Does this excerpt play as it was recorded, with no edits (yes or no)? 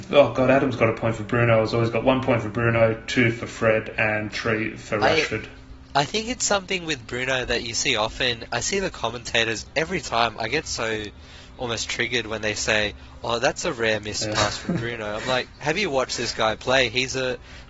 yes